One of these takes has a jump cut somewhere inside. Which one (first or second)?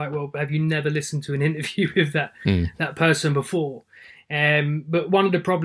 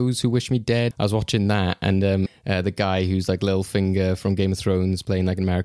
second